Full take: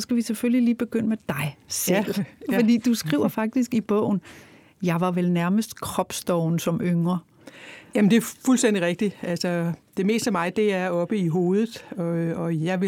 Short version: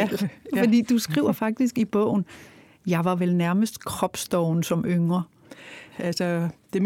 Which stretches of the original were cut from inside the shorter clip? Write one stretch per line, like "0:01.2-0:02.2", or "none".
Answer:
0:07.9-0:09.2